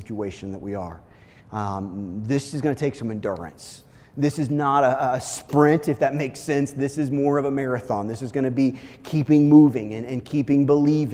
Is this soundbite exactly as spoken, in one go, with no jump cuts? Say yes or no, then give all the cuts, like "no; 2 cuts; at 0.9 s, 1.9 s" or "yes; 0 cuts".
yes; 0 cuts